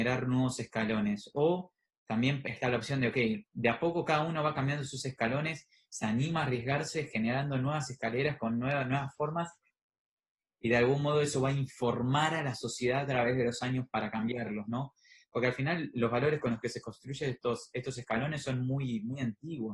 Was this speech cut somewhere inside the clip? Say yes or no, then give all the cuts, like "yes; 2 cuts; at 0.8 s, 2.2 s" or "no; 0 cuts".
no; 0 cuts